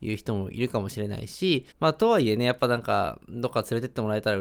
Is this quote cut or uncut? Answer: cut